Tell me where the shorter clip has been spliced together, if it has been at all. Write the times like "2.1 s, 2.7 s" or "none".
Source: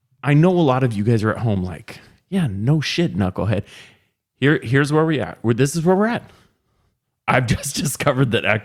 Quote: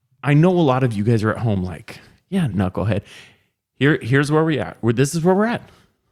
2.5 s